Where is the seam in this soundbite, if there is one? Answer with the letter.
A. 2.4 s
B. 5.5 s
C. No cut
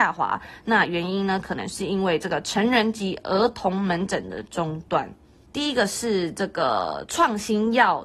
B